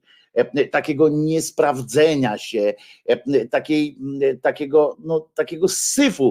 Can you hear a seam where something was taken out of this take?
yes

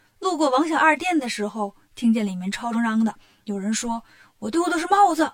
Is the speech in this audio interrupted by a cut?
yes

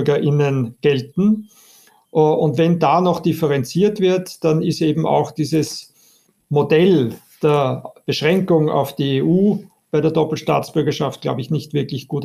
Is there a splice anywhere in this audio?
no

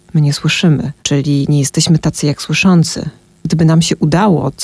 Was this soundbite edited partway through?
yes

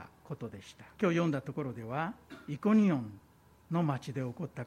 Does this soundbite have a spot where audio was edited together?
yes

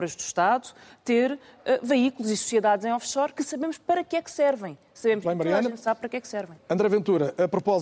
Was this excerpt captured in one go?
yes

